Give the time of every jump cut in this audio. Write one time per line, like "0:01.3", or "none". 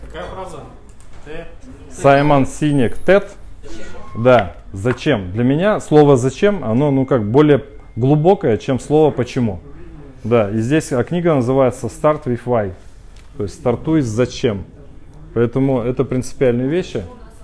0:03.6